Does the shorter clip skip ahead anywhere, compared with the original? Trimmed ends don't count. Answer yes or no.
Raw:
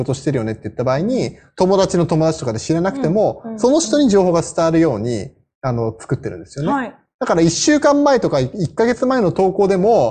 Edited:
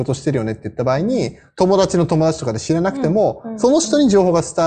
no